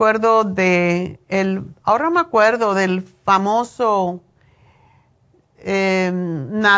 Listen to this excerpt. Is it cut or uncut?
uncut